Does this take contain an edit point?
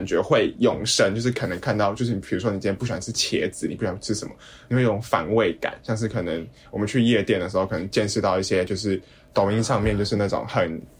no; 0 cuts

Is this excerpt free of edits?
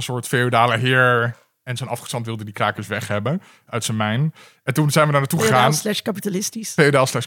yes; 0 cuts

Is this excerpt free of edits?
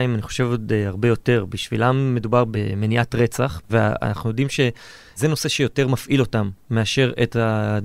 no; 1 cut; at 3.6 s

